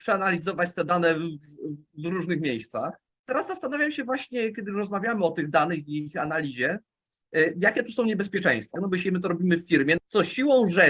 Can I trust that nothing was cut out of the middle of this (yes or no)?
no